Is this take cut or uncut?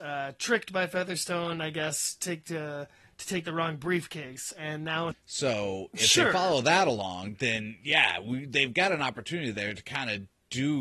cut